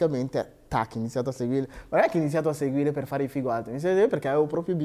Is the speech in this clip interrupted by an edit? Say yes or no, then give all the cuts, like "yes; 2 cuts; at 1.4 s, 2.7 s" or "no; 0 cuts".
no; 0 cuts